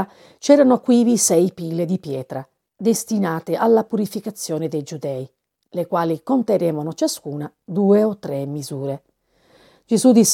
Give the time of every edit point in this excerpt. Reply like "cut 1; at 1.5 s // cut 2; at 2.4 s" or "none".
none